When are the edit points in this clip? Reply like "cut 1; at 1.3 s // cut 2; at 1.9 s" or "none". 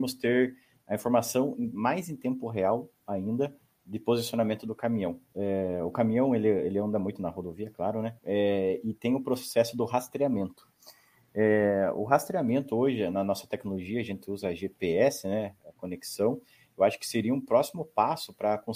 cut 1; at 5.3 s // cut 2; at 8.2 s